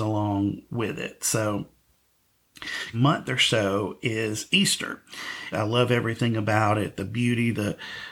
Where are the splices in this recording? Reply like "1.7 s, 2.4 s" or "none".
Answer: 2.9 s, 5.5 s